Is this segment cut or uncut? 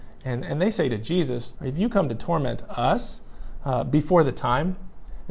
cut